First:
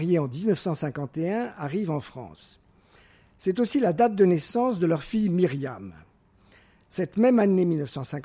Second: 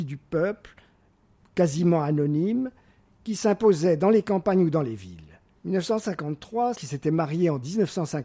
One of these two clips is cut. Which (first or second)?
second